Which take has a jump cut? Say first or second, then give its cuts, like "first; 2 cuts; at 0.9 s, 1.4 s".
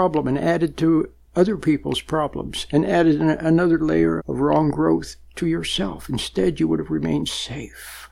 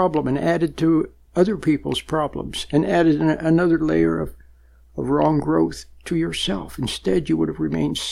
first; 1 cut; at 4.2 s